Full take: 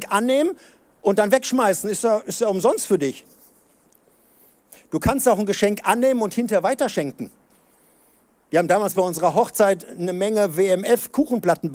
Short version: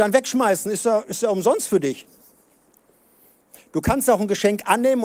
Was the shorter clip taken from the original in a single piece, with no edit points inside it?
yes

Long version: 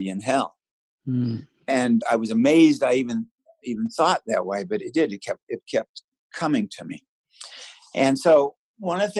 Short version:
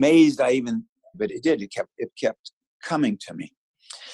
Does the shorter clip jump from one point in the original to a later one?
yes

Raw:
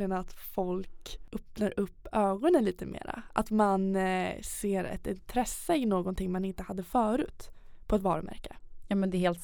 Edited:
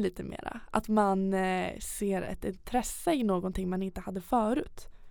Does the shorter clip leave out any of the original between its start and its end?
no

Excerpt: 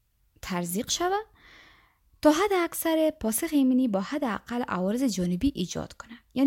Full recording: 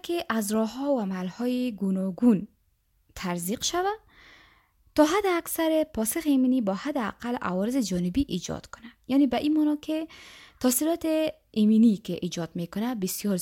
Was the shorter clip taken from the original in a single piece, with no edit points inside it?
yes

